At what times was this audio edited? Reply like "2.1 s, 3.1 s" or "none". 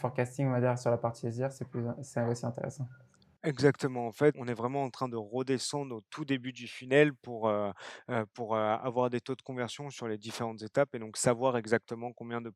4.3 s